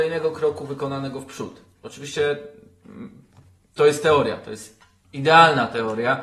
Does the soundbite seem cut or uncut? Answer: uncut